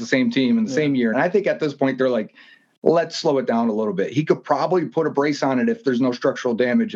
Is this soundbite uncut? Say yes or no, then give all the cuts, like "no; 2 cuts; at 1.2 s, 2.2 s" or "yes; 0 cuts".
no; 1 cut; at 1.1 s